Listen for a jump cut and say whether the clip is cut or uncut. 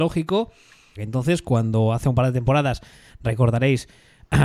cut